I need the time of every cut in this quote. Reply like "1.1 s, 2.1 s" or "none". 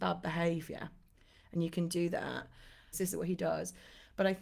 2.9 s